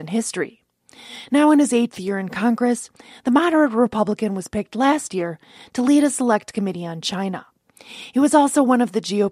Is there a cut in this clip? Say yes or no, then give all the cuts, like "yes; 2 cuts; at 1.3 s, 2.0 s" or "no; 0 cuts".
no; 0 cuts